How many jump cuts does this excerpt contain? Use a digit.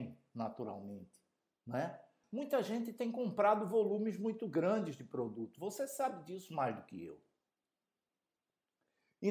1